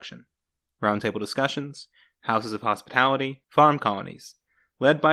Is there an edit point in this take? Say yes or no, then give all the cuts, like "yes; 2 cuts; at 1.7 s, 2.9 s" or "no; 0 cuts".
yes; 1 cut; at 3.4 s